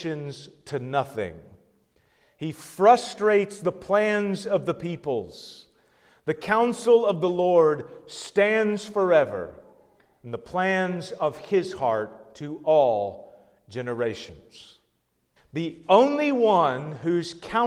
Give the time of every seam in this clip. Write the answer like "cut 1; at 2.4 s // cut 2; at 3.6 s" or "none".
cut 1; at 15.4 s